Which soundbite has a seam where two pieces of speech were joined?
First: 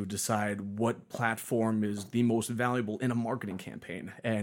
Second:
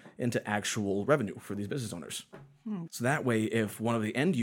second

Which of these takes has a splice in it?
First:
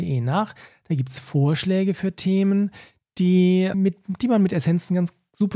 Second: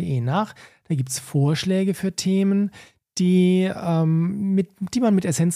first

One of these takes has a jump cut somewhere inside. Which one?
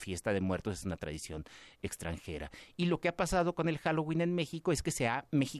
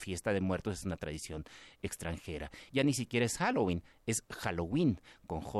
second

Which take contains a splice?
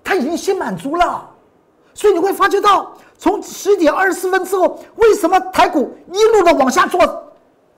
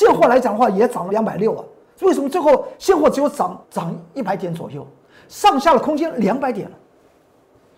second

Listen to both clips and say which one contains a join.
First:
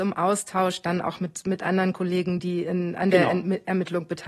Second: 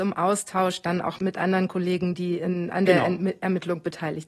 second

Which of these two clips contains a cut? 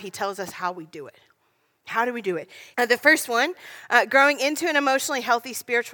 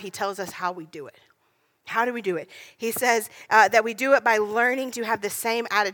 first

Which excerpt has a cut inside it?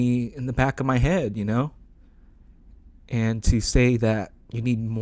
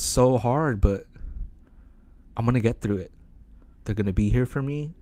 second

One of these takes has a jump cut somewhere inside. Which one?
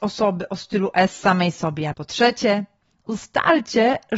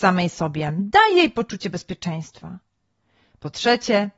first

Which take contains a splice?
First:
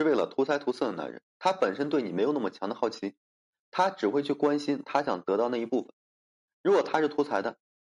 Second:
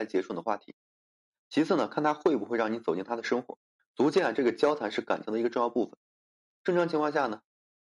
second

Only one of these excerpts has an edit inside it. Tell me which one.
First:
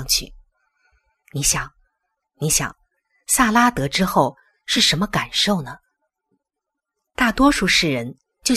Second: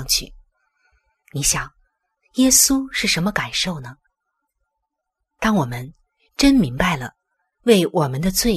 first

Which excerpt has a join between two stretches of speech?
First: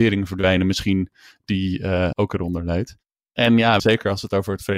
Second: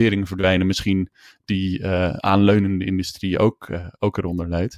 first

